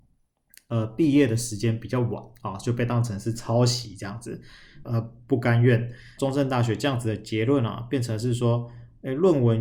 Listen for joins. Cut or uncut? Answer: cut